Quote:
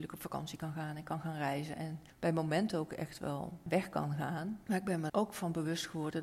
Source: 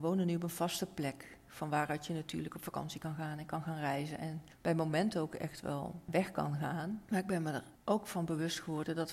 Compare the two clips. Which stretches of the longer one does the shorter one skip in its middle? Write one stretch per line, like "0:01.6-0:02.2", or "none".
0:07.5-0:07.8